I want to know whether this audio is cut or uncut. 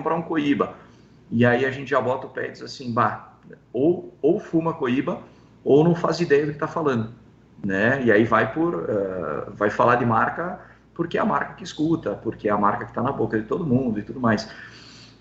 uncut